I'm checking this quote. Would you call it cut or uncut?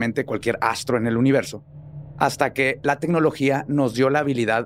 uncut